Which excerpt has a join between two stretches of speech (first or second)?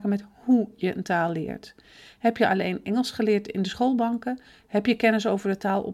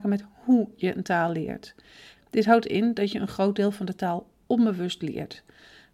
second